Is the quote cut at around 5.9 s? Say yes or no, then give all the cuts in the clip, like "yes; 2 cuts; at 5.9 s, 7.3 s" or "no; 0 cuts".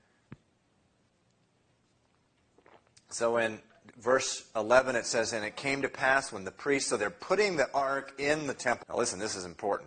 no; 1 cut; at 8.8 s